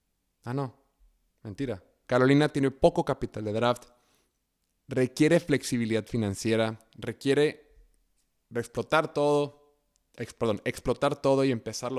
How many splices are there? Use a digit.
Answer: 1